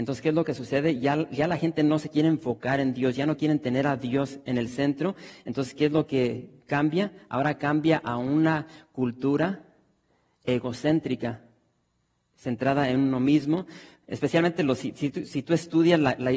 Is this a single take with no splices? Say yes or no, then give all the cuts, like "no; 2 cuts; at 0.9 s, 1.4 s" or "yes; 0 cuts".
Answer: yes; 0 cuts